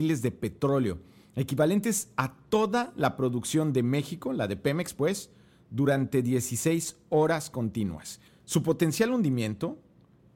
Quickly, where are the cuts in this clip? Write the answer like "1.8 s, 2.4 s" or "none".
8.3 s